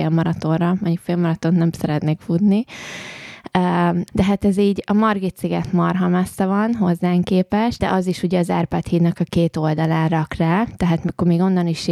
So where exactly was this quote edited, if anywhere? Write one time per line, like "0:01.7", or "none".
0:04.1
0:07.8